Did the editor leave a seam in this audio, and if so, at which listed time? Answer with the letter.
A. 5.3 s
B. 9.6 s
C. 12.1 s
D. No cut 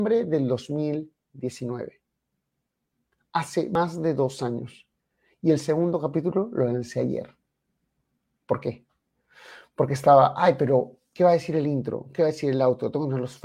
D